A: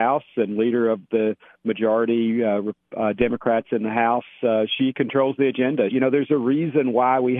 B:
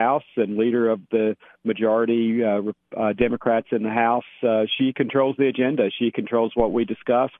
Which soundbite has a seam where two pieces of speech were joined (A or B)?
A